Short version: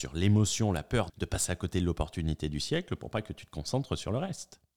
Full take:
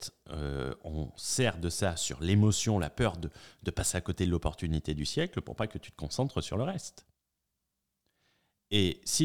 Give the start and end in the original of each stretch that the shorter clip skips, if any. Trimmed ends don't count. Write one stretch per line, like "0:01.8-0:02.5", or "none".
0:03.2-0:03.5